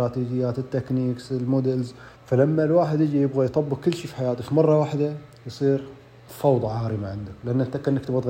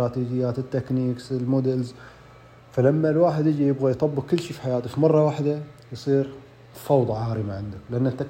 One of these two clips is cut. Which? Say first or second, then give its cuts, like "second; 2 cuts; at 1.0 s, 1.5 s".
first; 1 cut; at 2.2 s